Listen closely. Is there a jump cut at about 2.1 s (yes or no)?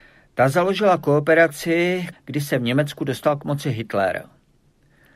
yes